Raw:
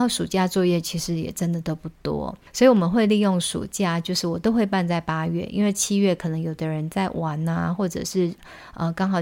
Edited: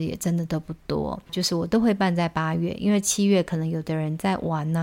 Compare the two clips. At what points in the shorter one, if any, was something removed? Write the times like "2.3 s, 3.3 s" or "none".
1.3 s